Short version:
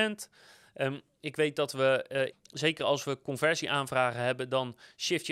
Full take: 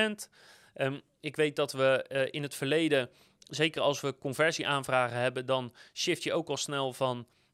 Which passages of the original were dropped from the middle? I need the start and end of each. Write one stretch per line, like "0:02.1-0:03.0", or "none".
0:02.3-0:03.3